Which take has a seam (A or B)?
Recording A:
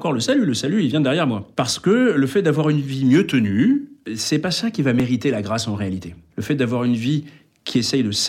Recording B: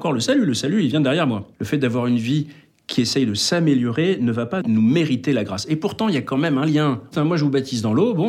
B